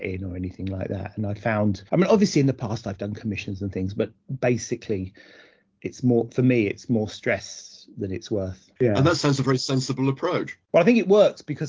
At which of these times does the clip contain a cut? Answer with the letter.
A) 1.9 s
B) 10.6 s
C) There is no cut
A